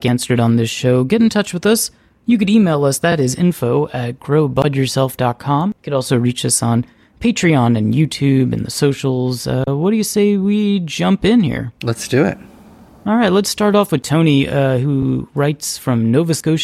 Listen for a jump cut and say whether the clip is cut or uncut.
cut